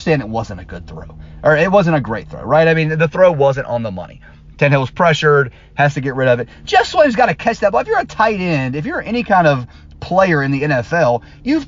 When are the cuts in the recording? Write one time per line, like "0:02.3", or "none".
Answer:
none